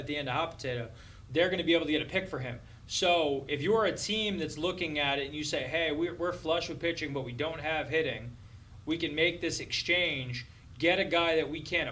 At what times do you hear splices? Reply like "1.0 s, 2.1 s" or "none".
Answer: 1.3 s